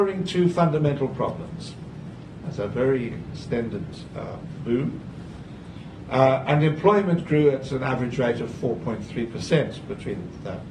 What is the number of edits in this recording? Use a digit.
1